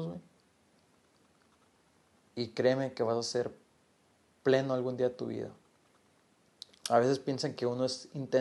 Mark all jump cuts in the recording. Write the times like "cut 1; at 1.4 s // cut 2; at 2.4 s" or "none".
cut 1; at 6.8 s